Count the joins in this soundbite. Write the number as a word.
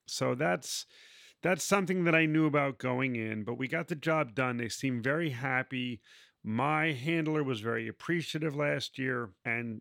zero